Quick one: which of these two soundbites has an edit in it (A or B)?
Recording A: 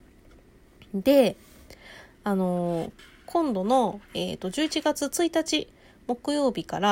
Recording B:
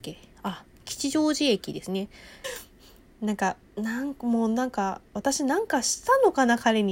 B